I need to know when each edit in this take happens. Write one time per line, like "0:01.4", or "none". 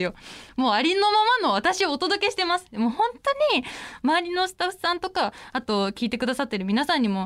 none